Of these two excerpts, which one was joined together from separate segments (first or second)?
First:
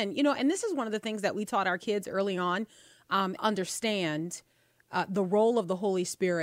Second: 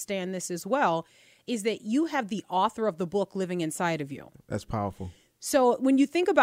first